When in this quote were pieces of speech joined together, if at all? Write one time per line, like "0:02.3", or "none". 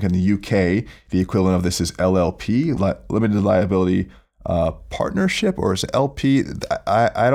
0:02.8